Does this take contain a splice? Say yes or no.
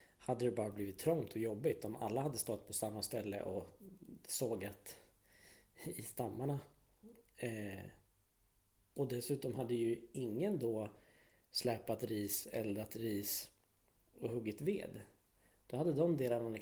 no